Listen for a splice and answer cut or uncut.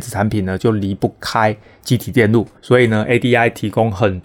cut